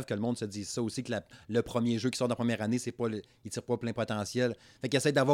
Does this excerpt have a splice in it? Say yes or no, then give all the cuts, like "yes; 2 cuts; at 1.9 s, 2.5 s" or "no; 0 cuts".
no; 0 cuts